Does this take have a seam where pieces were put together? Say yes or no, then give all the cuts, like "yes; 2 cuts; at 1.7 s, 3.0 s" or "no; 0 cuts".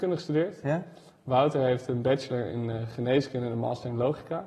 no; 0 cuts